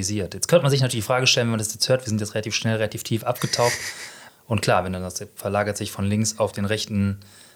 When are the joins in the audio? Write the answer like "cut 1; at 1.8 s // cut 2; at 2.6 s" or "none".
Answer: cut 1; at 4.3 s